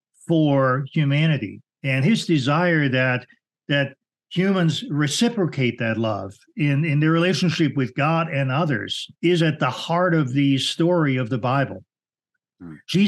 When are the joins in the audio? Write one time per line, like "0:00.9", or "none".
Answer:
0:01.7
0:09.2